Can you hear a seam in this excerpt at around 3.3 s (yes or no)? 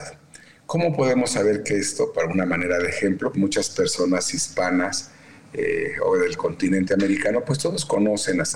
yes